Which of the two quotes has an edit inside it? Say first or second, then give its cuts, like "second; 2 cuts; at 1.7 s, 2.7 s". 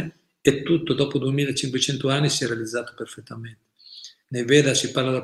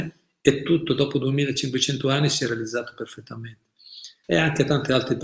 second; 1 cut; at 4.2 s